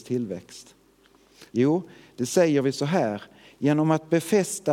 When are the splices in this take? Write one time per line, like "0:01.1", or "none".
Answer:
0:01.5